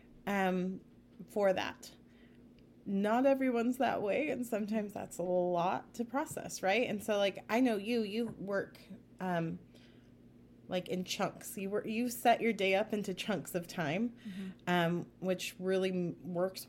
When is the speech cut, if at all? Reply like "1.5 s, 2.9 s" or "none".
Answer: none